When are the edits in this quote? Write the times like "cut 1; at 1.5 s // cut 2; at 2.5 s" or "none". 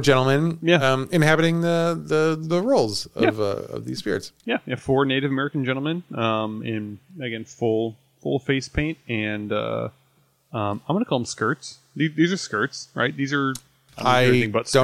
none